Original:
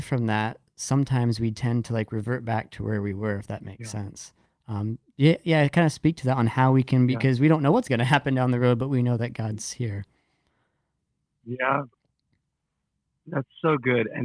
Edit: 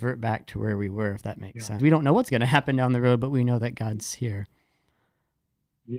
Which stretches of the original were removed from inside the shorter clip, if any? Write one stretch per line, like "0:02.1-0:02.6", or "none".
0:04.0-0:07.4